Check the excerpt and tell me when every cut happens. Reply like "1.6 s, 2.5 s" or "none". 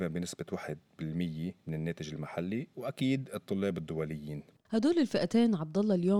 1.6 s